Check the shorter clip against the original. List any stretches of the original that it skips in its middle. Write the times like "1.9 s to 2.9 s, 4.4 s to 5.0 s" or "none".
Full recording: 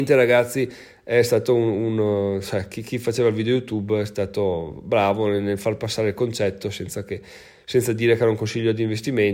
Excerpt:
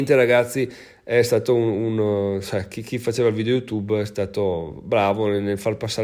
none

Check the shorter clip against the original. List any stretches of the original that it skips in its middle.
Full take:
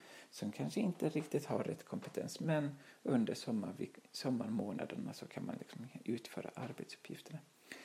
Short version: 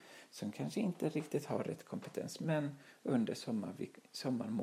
none

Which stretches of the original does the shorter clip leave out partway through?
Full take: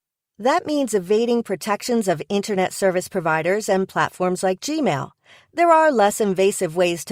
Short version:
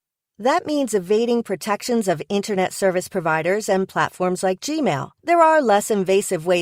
5.2 s to 5.5 s

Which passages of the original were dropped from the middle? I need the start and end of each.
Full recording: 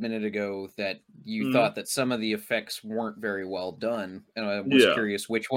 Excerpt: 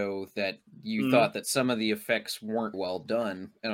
3.1 s to 3.5 s

